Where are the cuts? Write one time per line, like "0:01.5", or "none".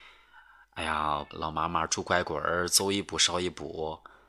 0:01.3